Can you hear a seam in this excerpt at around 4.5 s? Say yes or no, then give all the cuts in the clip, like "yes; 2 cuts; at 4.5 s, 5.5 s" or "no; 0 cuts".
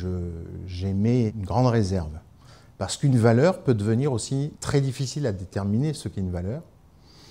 yes; 2 cuts; at 1.3 s, 4.5 s